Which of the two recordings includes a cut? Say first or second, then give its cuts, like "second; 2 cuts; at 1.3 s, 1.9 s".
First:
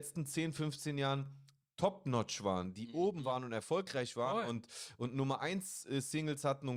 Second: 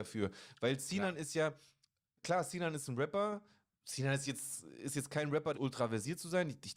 second; 1 cut; at 5.5 s